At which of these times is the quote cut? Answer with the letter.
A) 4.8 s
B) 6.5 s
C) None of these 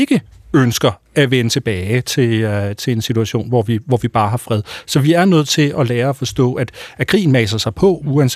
C